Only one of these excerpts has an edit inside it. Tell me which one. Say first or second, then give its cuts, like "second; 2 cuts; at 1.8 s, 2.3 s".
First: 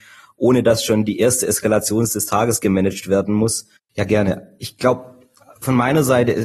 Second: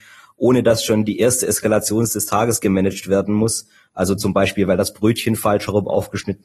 first; 1 cut; at 3.8 s